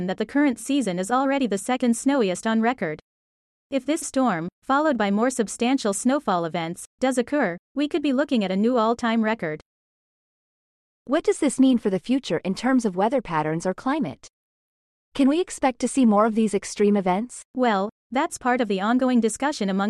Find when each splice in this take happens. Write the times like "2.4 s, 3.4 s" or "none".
17.4 s